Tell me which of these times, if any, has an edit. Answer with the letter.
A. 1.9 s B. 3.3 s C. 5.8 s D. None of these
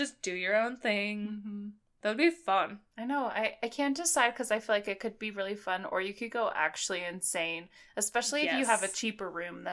D